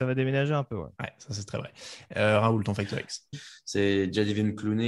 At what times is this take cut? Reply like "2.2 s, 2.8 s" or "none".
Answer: 3.3 s